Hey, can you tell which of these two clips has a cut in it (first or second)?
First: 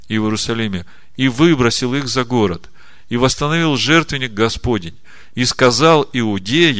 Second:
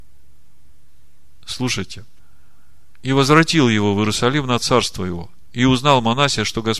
first